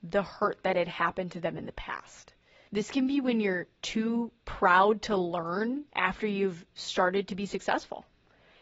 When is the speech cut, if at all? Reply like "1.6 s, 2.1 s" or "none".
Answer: 2.7 s, 5.9 s